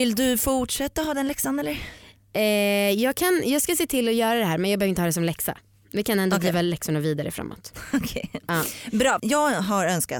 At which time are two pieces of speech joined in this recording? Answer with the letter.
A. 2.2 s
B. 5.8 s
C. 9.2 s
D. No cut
C